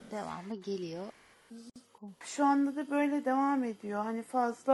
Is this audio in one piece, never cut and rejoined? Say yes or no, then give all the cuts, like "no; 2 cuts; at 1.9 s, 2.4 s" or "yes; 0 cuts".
no; 1 cut; at 2.2 s